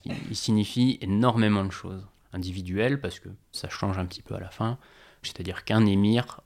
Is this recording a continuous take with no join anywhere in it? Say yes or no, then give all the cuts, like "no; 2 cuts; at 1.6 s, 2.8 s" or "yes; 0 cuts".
no; 3 cuts; at 2.2 s, 3.5 s, 5.2 s